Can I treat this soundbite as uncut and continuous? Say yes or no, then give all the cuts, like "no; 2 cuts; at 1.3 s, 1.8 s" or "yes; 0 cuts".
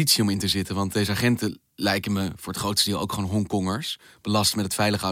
yes; 0 cuts